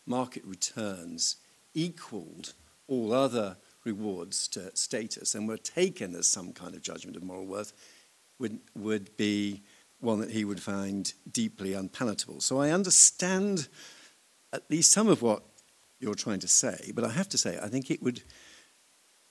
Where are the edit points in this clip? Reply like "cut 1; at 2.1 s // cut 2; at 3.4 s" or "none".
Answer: none

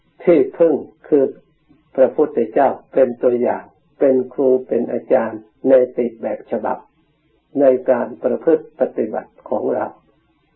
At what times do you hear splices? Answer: cut 1; at 1.0 s

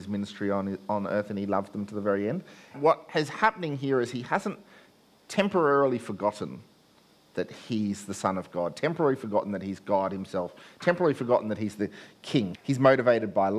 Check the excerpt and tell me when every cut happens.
cut 1; at 2.7 s // cut 2; at 12.5 s

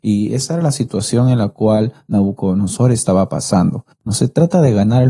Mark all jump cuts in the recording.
cut 1; at 4.0 s

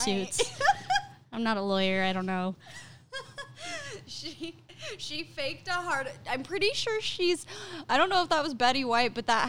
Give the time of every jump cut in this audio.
none

